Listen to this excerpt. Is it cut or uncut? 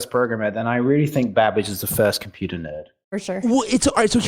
uncut